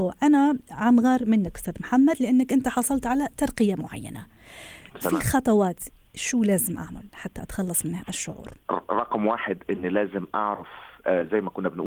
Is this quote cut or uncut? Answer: uncut